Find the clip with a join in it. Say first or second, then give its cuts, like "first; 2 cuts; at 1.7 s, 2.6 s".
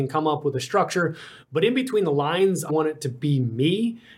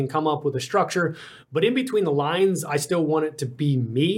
first; 1 cut; at 2.7 s